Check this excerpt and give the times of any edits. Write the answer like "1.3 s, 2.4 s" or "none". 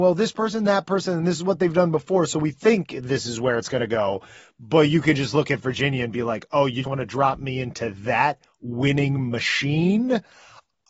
6.8 s